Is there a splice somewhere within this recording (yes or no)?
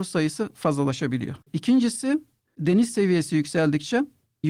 yes